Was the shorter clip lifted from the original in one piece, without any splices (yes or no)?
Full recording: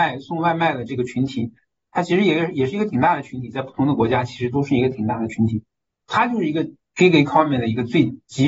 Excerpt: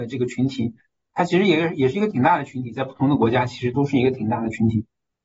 yes